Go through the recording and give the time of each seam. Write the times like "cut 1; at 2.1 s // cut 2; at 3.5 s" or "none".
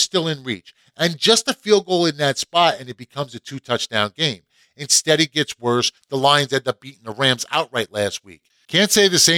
cut 1; at 6.0 s